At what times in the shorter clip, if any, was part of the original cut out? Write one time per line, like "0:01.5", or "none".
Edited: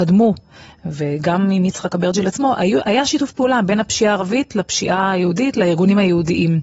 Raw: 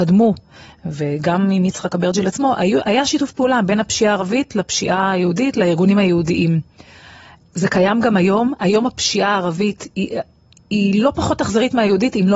none